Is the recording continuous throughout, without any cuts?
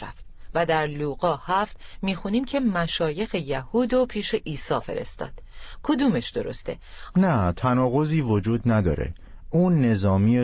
no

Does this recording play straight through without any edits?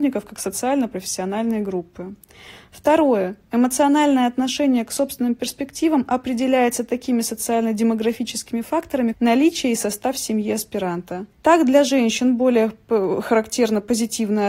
no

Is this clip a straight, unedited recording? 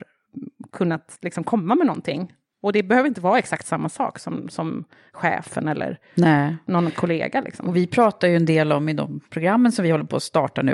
yes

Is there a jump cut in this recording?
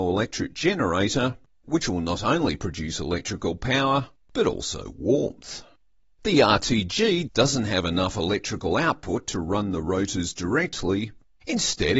no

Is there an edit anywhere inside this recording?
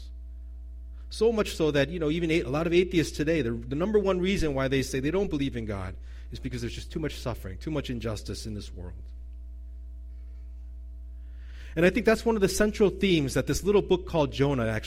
no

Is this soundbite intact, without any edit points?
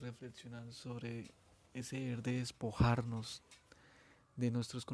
yes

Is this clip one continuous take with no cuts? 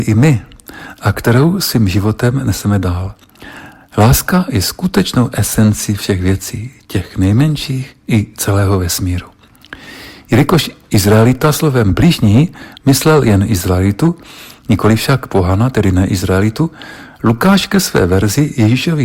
yes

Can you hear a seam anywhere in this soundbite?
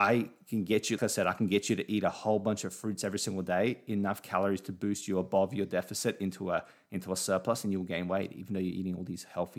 yes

